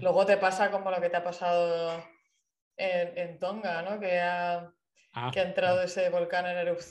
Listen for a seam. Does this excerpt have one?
yes; 1 cut; at 3.1 s

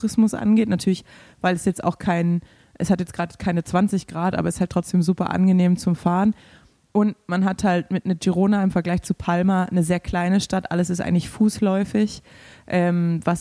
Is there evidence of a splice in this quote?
no; 0 cuts

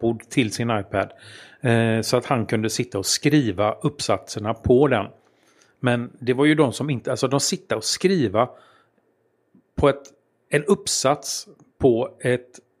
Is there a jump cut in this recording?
no; 0 cuts

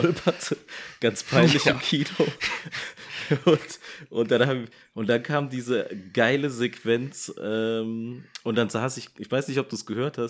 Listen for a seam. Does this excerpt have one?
no; 0 cuts

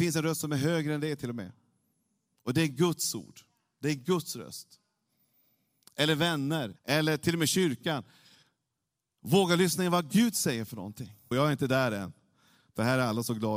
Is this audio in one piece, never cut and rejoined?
no; 2 cuts; at 6.8 s, 11.3 s

